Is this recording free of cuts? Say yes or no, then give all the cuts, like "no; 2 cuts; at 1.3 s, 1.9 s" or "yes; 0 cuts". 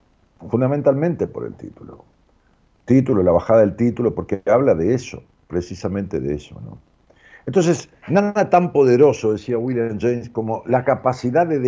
yes; 0 cuts